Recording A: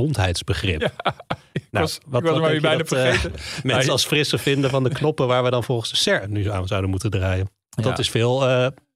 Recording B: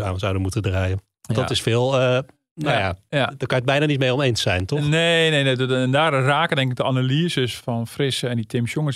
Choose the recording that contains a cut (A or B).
B